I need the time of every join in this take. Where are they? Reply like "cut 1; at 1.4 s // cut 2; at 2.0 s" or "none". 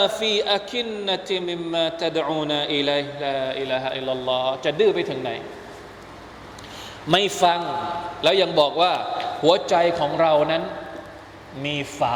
cut 1; at 1.4 s